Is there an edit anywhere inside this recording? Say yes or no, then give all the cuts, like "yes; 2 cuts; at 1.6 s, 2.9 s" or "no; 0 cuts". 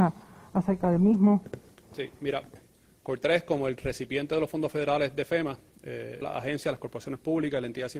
yes; 2 cuts; at 2.6 s, 6.2 s